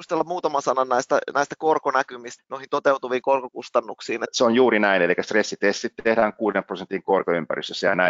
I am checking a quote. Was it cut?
yes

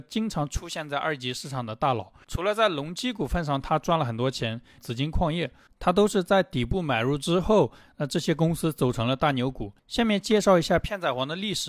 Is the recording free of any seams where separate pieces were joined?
no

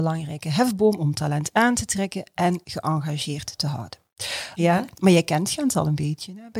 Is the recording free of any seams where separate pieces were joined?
no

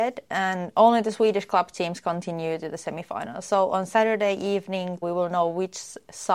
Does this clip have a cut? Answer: yes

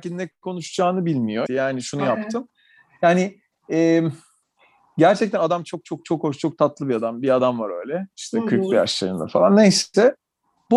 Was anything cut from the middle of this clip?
yes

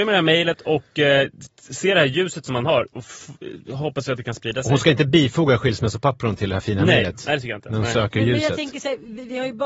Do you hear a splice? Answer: no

